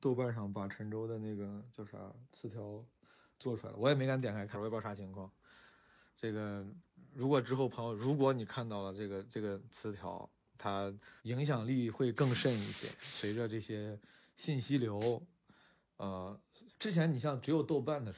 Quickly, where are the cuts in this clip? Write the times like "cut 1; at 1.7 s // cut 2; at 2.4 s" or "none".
cut 1; at 4.5 s // cut 2; at 11.2 s // cut 3; at 16.7 s